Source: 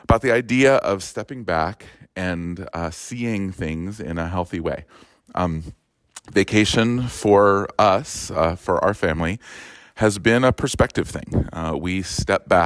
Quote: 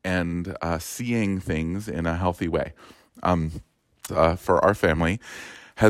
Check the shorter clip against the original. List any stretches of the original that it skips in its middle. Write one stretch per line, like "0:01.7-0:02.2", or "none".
0:06.2-0:08.3